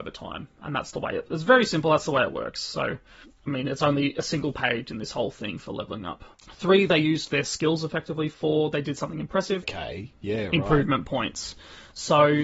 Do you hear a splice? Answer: yes; 3 cuts; at 3.2 s, 6.3 s, 9.6 s

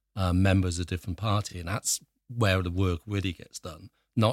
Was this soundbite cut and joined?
no; 0 cuts

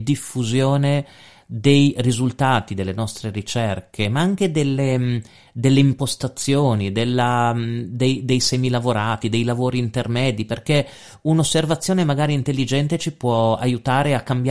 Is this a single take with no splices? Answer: yes; 0 cuts

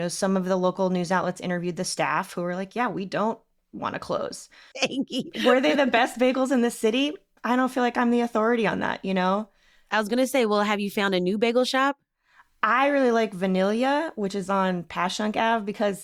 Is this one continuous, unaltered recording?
no; 1 cut; at 4.7 s

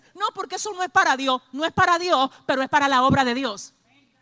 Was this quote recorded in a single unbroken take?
yes; 0 cuts

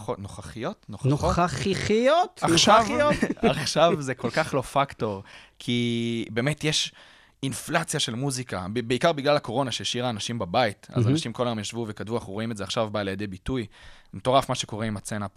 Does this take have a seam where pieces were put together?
no; 0 cuts

